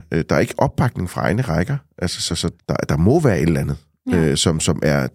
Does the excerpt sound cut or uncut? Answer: uncut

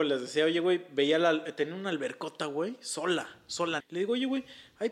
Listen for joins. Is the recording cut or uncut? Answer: cut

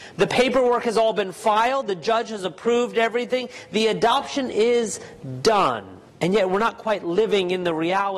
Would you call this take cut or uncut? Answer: cut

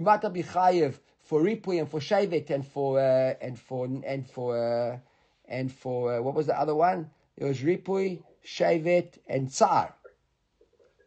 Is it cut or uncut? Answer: uncut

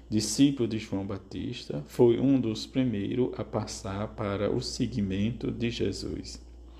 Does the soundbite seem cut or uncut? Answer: uncut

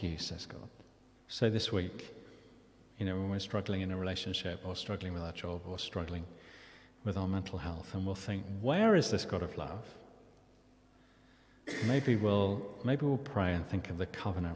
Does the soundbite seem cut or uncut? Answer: cut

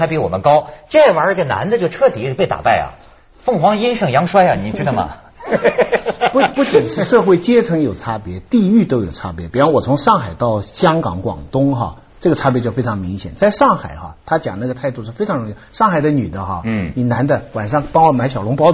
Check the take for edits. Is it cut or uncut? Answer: uncut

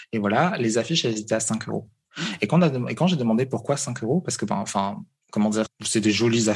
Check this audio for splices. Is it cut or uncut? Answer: cut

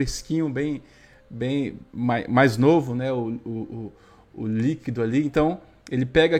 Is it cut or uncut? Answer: uncut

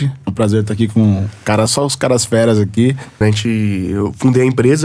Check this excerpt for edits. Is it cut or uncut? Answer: cut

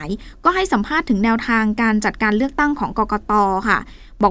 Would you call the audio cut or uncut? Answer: uncut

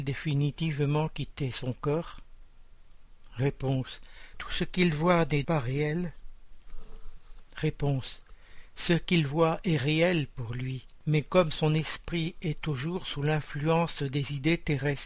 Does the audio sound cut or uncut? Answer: cut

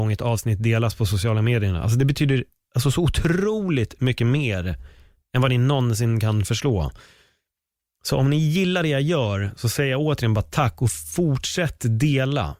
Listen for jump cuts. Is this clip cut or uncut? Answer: uncut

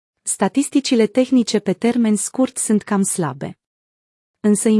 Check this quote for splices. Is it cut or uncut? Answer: uncut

